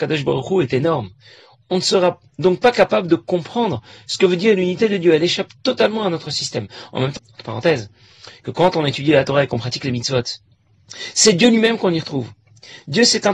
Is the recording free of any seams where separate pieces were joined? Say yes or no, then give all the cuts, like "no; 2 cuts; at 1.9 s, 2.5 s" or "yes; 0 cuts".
no; 1 cut; at 7.2 s